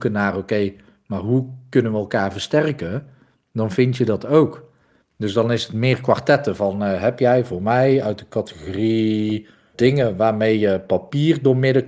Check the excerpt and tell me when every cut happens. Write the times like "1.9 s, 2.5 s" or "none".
9.7 s